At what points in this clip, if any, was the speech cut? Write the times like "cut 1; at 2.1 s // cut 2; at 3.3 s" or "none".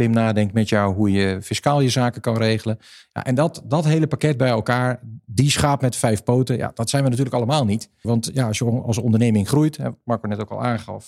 cut 1; at 8.0 s